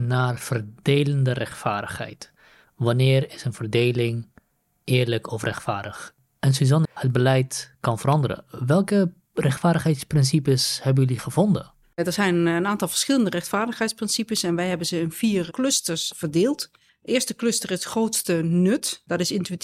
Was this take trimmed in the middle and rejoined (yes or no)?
yes